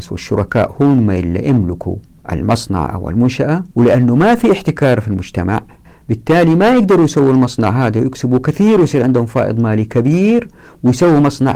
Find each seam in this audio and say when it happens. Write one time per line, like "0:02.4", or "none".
0:03.7